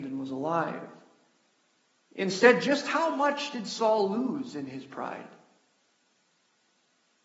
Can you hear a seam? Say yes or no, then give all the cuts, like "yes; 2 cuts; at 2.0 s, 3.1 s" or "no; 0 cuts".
yes; 1 cut; at 2.0 s